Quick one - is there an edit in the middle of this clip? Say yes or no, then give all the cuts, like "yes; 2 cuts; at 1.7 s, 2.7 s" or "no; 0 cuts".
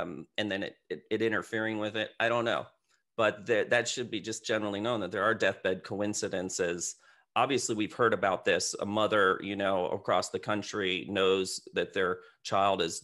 no; 0 cuts